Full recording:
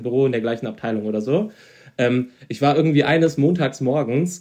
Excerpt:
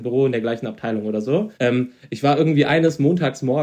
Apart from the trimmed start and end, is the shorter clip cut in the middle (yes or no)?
yes